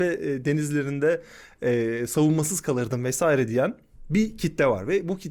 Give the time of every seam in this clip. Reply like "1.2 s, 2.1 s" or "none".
none

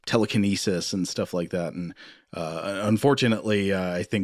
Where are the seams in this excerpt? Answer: none

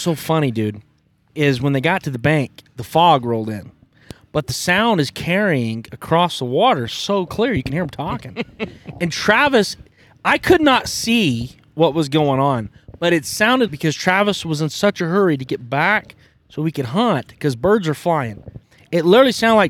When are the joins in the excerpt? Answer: 2.7 s, 13.7 s

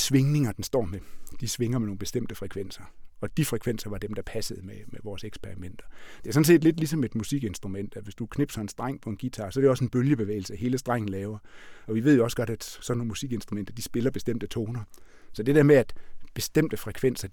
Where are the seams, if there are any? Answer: none

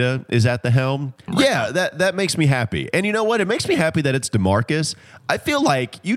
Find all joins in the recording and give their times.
1.3 s

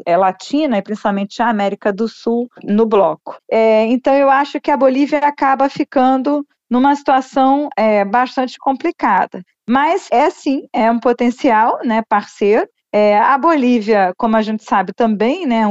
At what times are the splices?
3.4 s

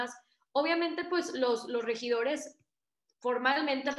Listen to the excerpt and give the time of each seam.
none

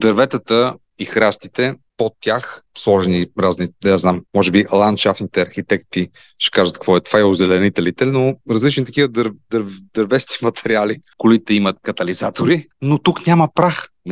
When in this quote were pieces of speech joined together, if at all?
11.1 s, 12.7 s

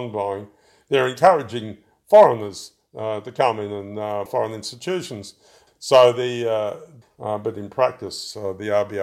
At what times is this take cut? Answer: 4.3 s, 5.7 s, 7.0 s

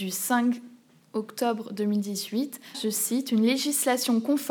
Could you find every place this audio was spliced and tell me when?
2.7 s

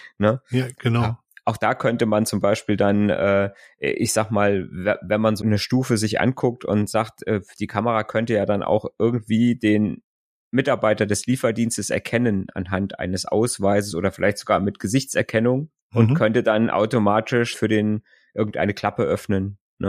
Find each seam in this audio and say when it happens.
5.4 s, 15.8 s, 17.5 s

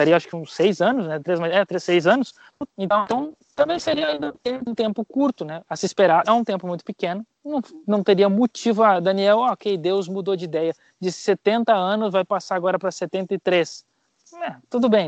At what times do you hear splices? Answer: 6.2 s

